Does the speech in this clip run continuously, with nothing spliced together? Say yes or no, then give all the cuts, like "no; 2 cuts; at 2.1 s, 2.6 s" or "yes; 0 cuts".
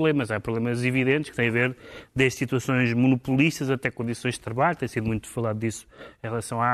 yes; 0 cuts